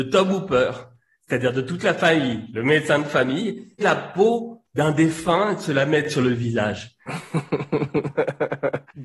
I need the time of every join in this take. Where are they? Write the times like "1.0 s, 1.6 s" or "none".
3.8 s